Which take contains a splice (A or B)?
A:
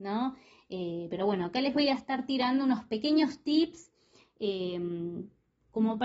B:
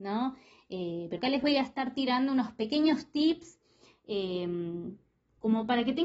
B